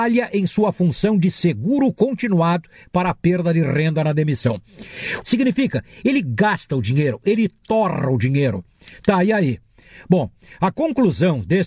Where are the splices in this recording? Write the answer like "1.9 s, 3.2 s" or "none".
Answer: 5.2 s